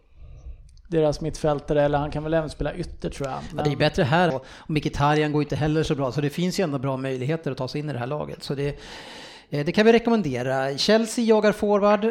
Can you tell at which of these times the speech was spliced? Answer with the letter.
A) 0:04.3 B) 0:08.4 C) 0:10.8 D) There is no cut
A